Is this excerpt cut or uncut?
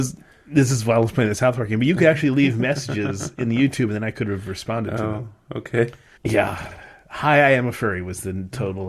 cut